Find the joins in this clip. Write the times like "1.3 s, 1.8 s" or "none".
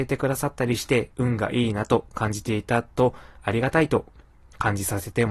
none